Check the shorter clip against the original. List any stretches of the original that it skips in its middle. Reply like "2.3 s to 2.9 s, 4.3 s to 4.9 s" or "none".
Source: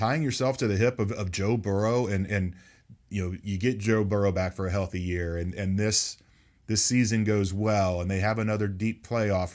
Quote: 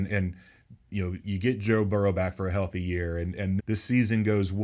5.8 s to 6.6 s